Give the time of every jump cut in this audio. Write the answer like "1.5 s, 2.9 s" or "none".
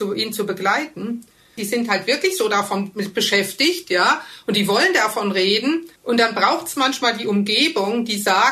1.6 s, 6.0 s